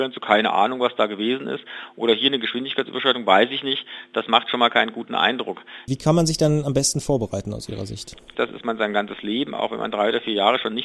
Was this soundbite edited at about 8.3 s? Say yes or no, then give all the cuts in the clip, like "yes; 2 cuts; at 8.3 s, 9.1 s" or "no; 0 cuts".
yes; 2 cuts; at 5.9 s, 8.3 s